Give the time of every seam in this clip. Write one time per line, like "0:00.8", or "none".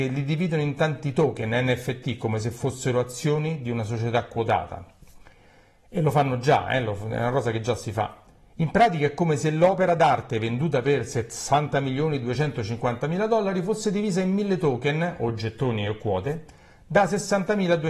none